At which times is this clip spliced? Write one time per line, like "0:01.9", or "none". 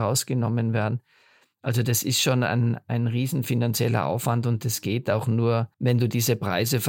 0:05.7